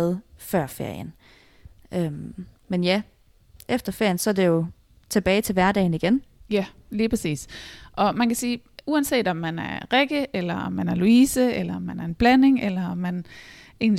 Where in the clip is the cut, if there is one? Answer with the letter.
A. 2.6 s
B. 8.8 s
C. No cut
A